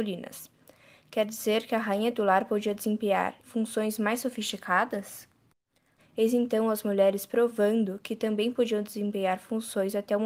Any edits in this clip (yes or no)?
yes